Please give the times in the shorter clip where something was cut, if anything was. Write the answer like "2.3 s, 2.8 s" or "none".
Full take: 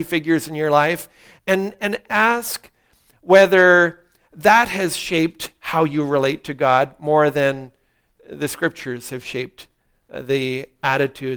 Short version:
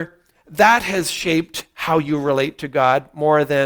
none